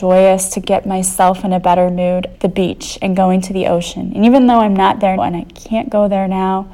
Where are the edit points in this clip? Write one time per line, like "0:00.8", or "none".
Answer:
0:02.3
0:05.2